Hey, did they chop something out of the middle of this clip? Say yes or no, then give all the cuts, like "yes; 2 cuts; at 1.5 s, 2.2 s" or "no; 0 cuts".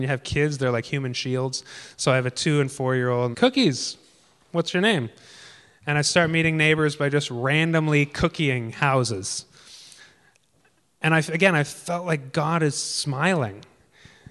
yes; 1 cut; at 3.3 s